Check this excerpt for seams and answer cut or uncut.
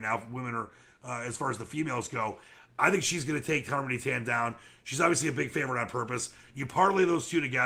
uncut